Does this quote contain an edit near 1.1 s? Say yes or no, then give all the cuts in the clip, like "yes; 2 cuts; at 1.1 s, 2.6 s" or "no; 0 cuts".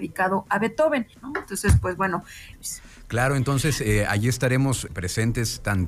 yes; 3 cuts; at 1.1 s, 2.5 s, 4.9 s